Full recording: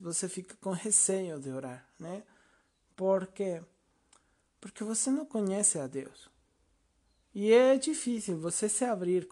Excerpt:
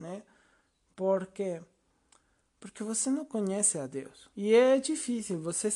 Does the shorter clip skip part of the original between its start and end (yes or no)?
yes